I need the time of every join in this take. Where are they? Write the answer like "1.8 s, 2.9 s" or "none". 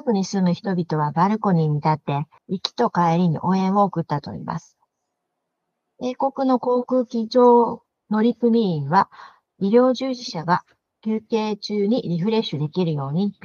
2.4 s, 9.5 s